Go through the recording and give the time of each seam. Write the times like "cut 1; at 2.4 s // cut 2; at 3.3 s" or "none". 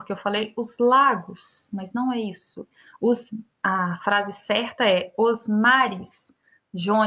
none